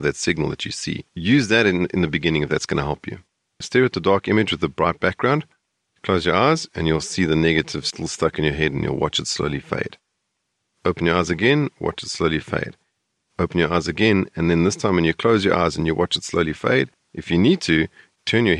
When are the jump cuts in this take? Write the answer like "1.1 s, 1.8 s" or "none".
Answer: 1.1 s